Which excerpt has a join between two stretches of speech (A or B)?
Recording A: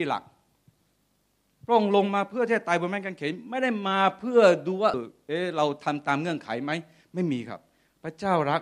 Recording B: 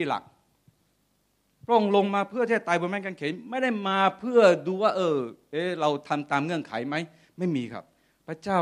A